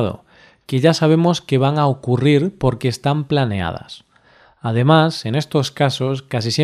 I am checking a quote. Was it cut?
no; 0 cuts

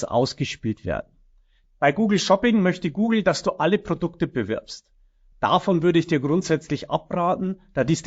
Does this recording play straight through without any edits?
no; 2 cuts; at 1.6 s, 5.3 s

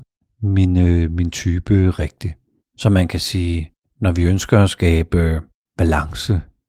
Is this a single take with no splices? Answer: no; 1 cut; at 2.6 s

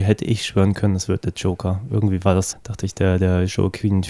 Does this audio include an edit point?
yes; 1 cut; at 2.5 s

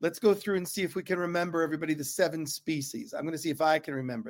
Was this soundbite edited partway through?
no; 0 cuts

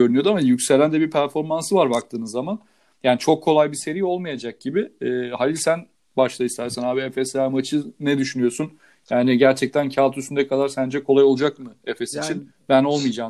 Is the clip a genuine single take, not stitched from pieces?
yes; 0 cuts

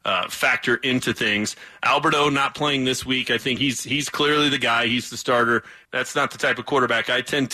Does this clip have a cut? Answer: yes; 2 cuts; at 3.6 s, 5.8 s

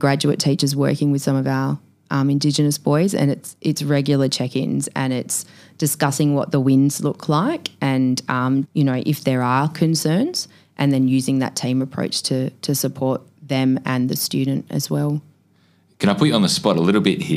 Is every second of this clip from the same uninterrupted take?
no; 1 cut; at 8.6 s

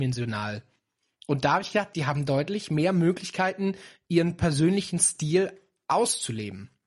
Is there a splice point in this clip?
yes; 1 cut; at 1.9 s

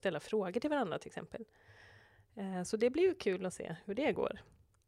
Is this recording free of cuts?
yes; 0 cuts

